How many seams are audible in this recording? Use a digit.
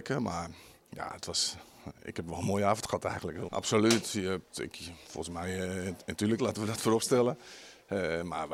2